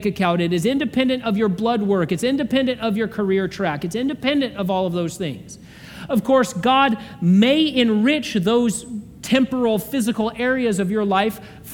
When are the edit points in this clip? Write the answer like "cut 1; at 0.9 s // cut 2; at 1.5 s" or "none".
none